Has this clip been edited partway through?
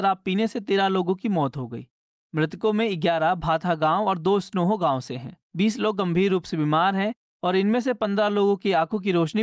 yes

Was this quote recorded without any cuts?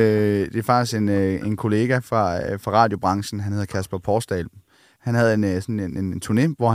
no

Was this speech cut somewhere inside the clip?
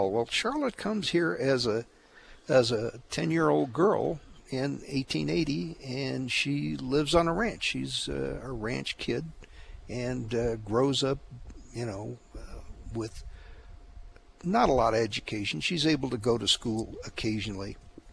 no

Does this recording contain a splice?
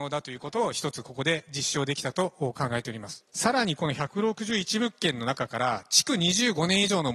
yes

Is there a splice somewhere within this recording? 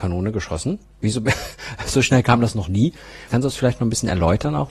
yes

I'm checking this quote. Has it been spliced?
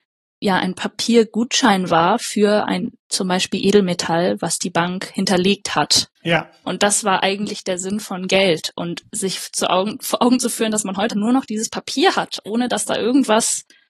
yes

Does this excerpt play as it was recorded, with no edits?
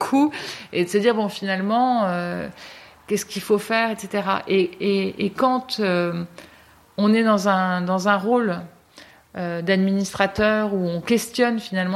yes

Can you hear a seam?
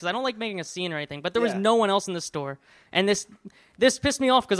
no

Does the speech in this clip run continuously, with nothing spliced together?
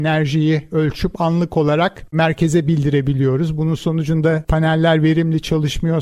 yes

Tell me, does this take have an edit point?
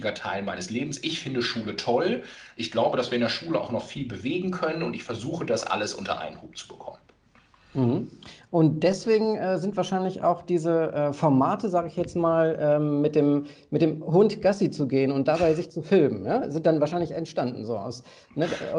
no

